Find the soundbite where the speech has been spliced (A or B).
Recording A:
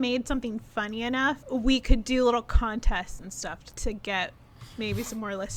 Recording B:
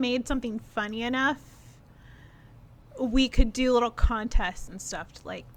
A